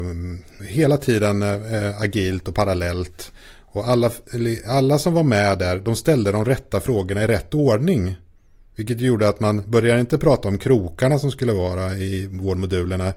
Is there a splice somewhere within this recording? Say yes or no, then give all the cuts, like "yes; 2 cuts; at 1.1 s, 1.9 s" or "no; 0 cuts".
no; 0 cuts